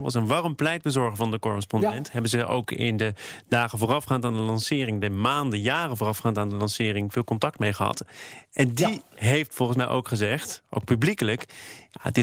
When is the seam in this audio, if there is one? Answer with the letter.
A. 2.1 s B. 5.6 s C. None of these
C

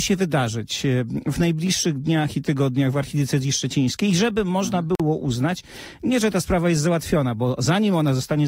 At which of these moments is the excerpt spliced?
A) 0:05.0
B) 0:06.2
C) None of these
C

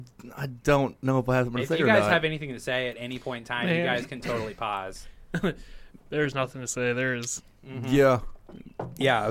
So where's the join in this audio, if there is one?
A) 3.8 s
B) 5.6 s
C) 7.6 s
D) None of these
C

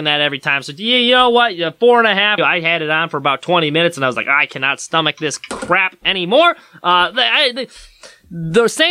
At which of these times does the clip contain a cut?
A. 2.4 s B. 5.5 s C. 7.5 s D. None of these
A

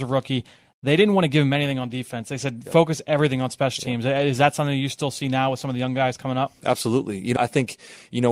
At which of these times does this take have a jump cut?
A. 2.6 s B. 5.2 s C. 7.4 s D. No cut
C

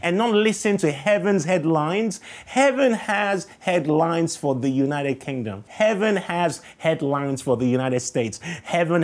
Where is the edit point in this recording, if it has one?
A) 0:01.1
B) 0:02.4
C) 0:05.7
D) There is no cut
C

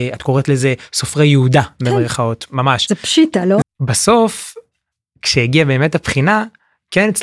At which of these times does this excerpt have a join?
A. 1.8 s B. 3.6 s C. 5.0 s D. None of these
B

